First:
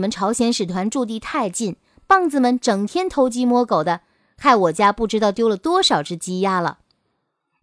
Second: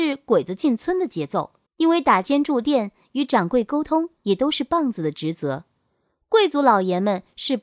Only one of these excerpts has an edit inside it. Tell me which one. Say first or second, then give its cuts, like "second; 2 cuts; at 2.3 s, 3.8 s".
second; 1 cut; at 1.7 s